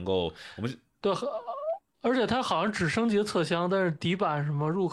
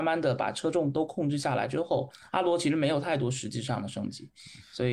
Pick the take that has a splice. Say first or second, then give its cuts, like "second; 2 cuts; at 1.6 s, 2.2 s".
first; 1 cut; at 1.9 s